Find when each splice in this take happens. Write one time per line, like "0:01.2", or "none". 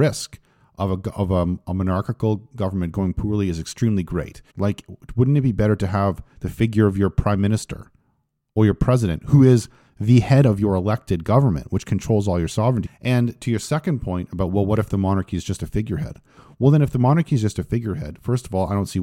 0:04.5
0:12.8